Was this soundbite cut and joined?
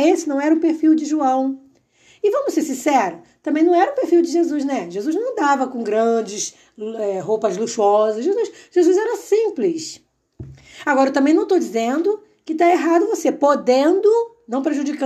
no; 0 cuts

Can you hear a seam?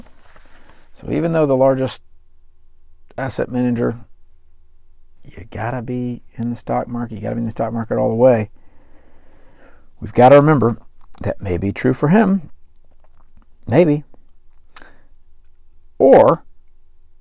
yes; 1 cut; at 5.2 s

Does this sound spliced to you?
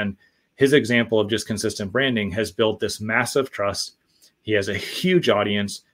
no; 0 cuts

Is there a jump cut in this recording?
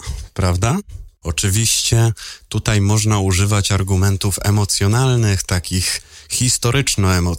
yes; 1 cut; at 1.2 s

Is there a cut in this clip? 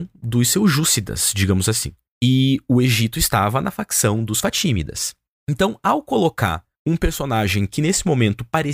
no; 0 cuts

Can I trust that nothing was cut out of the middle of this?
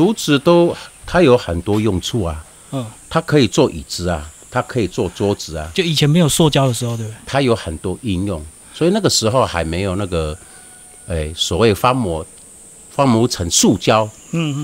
no; 1 cut; at 7.2 s

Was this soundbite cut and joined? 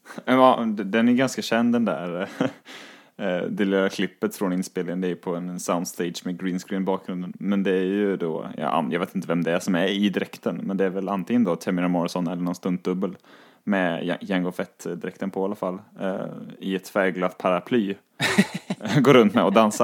no; 0 cuts

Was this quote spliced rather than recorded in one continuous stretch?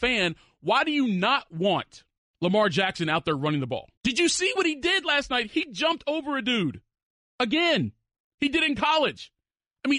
no; 0 cuts

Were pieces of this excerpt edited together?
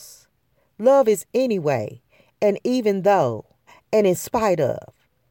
no; 0 cuts

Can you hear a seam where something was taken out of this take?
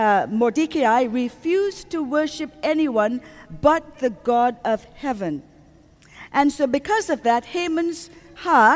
no; 0 cuts

